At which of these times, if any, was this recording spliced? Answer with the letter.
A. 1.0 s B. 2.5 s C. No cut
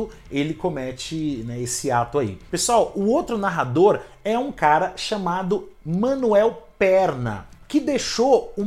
B